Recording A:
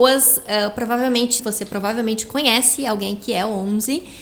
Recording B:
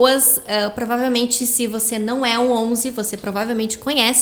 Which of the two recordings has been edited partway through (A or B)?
A